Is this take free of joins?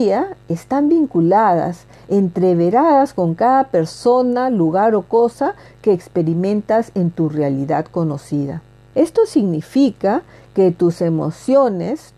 no; 1 cut; at 8.9 s

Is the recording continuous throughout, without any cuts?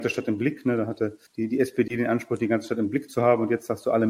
no; 1 cut; at 1.3 s

